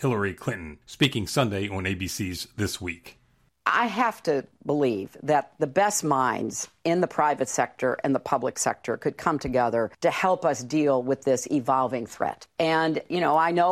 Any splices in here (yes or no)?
no